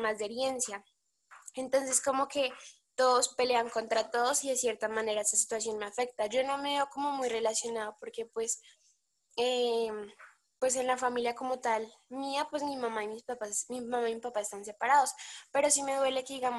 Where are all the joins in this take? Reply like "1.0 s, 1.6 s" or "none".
none

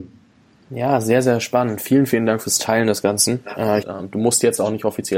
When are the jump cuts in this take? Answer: 3.8 s

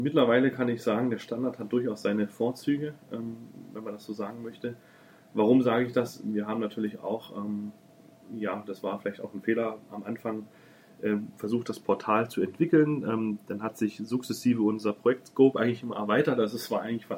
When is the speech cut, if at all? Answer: none

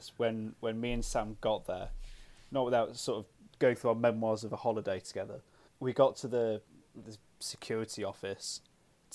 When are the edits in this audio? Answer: 5.7 s, 7.0 s

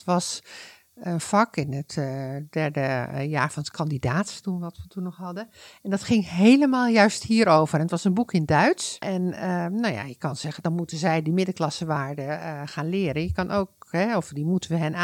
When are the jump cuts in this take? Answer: 9.0 s

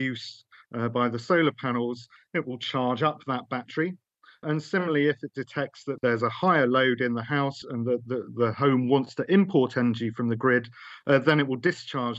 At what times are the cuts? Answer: 7.6 s

